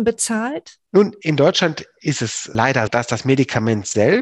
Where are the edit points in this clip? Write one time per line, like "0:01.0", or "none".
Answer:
0:02.9